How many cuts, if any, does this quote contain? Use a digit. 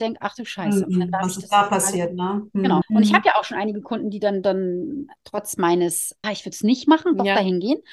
2